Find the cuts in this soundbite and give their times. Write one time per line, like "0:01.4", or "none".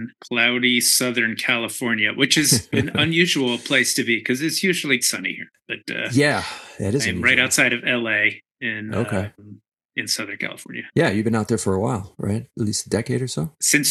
0:05.0